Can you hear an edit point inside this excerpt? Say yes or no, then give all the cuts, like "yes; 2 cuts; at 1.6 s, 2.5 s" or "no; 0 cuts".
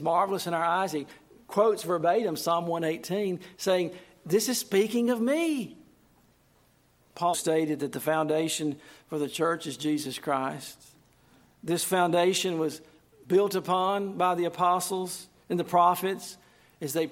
yes; 1 cut; at 7.3 s